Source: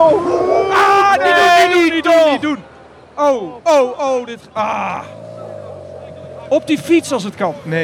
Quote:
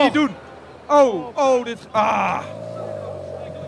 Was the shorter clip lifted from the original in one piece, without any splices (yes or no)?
no